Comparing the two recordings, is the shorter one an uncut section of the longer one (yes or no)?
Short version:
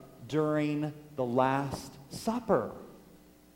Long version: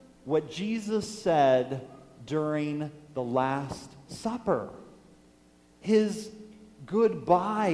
yes